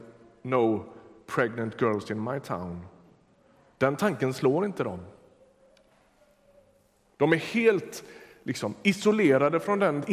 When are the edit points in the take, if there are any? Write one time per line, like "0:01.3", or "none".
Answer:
none